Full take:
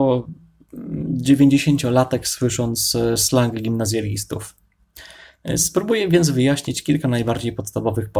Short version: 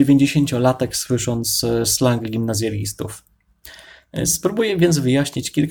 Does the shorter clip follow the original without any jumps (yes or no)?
yes